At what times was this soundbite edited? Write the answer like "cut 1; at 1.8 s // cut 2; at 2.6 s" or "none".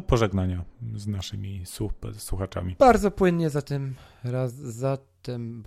none